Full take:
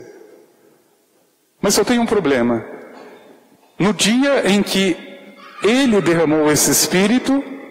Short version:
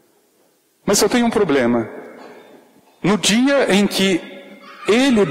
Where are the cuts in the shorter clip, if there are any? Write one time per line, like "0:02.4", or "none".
none

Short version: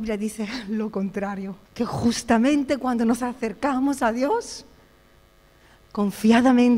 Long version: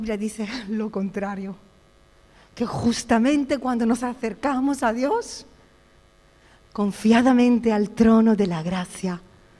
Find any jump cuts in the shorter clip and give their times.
0:01.6

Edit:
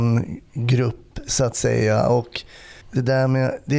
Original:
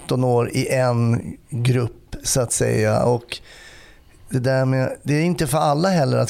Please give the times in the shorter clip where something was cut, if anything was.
0:02.8

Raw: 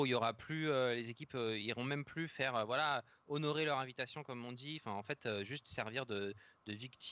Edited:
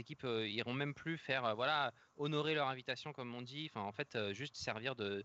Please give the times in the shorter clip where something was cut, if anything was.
none

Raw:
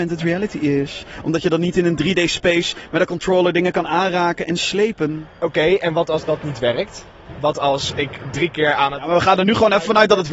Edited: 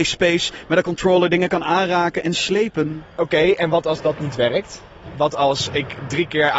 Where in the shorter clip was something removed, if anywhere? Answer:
none

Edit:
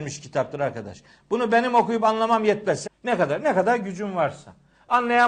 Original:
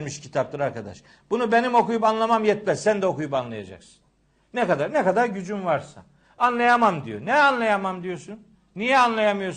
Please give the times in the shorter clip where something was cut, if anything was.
0:02.8

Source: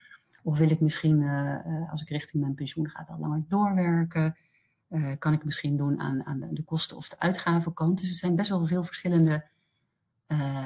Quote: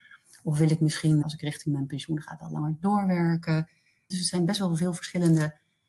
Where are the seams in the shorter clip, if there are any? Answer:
0:01.2
0:04.1

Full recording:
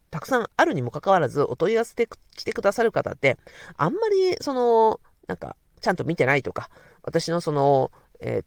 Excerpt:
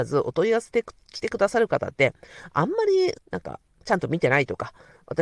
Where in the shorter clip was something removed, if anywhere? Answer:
0:03.1

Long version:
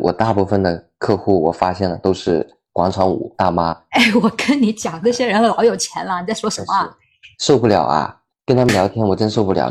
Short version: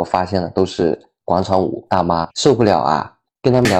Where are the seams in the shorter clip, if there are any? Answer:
0:02.3

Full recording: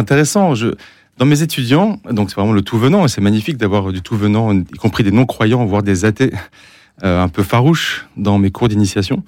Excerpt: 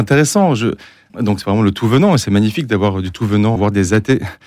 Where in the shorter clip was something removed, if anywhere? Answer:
0:01.1
0:03.6

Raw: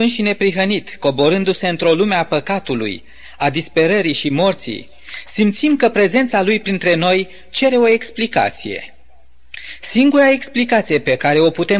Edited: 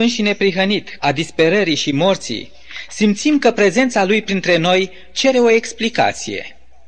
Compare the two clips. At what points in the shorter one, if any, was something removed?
0:01.0

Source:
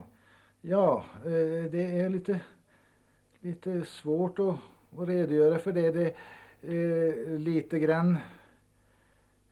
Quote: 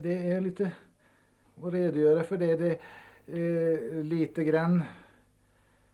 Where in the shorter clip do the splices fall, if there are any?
0:01.4

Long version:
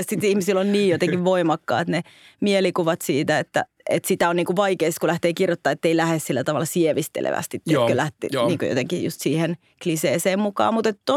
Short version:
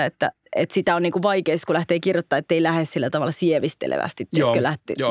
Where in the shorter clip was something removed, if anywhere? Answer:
none

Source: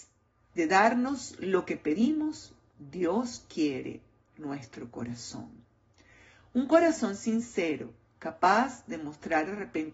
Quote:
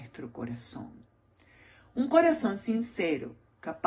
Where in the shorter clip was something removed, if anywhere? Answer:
none

